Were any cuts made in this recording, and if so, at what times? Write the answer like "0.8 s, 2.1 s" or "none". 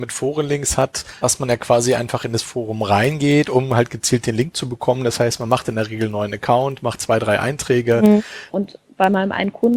8.5 s